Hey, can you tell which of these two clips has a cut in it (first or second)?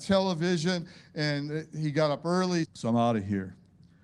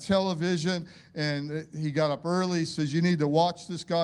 first